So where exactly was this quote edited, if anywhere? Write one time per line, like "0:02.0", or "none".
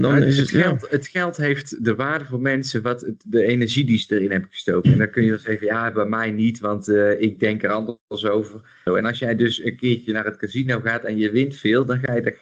0:08.9